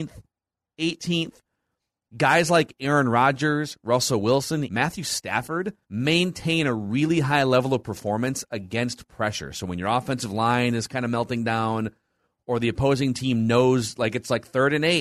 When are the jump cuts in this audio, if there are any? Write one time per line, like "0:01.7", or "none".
0:04.6
0:05.8

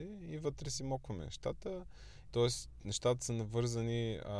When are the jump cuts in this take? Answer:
0:02.2

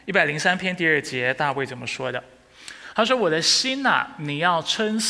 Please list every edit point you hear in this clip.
none

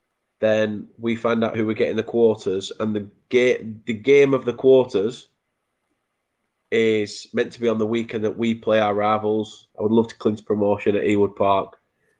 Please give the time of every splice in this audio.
0:09.7

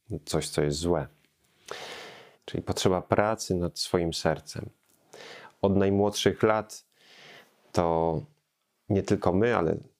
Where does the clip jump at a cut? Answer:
0:02.3

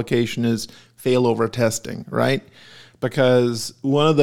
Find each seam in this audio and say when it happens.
none

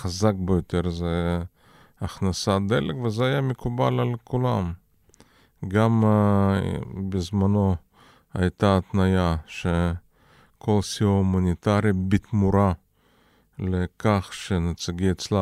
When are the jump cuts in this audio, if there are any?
none

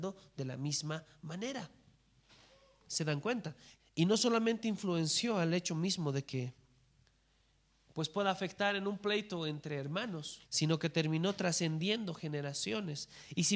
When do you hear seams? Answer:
0:03.8
0:10.4

